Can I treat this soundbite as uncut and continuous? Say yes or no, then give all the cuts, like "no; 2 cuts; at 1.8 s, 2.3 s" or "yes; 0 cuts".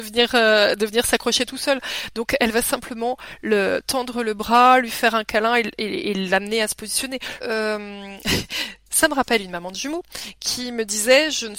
no; 1 cut; at 7.4 s